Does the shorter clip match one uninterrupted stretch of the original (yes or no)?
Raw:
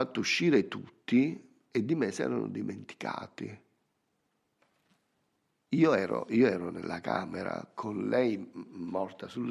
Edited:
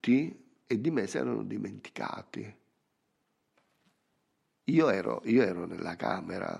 yes